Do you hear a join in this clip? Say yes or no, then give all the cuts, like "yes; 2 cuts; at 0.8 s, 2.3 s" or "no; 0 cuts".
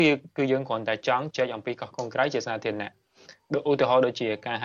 yes; 1 cut; at 1.3 s